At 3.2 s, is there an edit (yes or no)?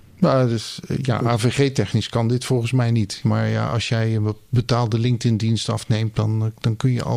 yes